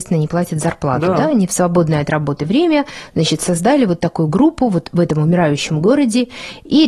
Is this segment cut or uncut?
uncut